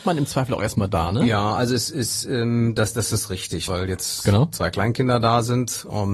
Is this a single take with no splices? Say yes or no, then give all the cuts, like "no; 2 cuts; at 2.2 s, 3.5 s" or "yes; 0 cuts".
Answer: no; 1 cut; at 3.7 s